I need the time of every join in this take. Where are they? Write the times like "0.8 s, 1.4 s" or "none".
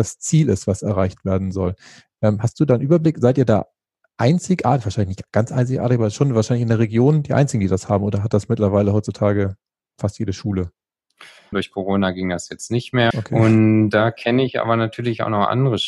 11.5 s, 13.1 s